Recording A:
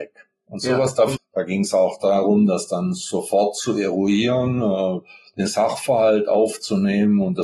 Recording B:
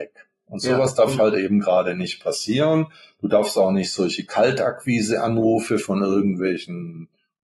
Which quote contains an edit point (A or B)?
A